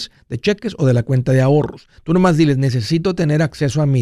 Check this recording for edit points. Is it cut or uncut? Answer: uncut